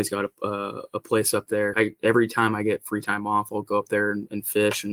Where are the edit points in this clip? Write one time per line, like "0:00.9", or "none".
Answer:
0:01.7

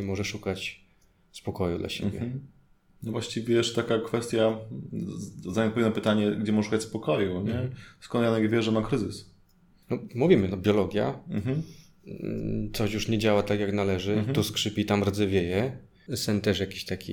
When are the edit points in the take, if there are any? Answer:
0:16.1

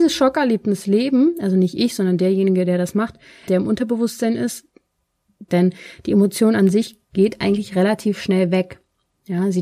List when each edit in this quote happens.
0:03.5
0:05.5

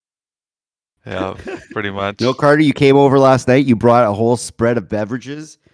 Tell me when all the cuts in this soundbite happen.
none

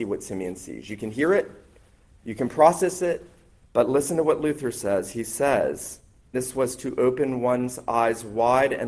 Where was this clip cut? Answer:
0:03.6
0:06.3

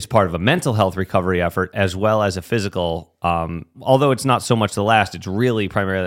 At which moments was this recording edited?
0:03.7

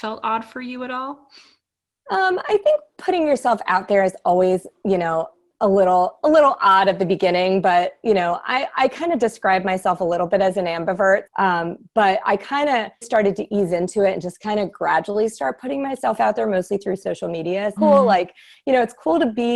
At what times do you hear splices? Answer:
0:11.3
0:13.0
0:17.8

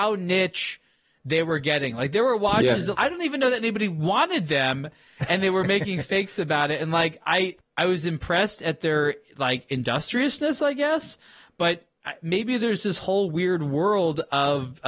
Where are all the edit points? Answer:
0:02.9

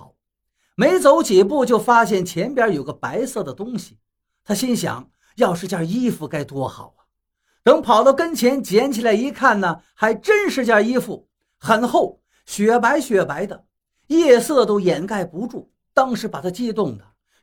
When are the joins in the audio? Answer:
none

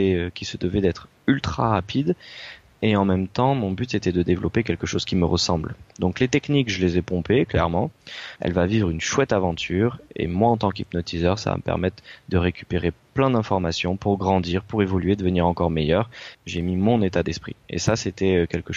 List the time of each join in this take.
0:08.4
0:16.3

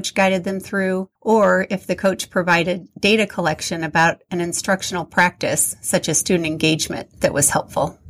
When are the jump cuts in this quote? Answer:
0:01.2

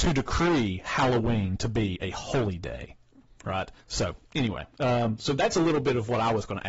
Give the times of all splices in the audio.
0:03.8

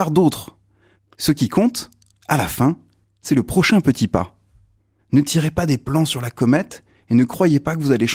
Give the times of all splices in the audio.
0:01.0
0:05.0

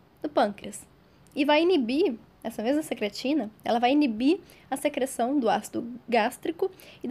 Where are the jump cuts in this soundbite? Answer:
0:01.2

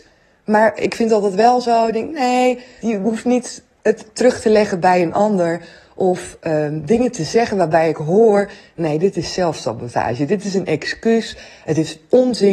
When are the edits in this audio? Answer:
0:02.8

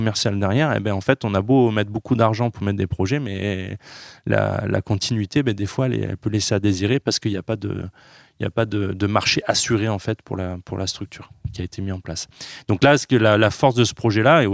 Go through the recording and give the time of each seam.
none

